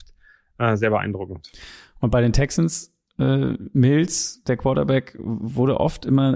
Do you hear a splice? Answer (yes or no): no